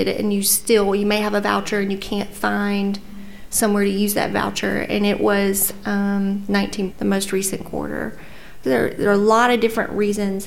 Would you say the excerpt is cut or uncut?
cut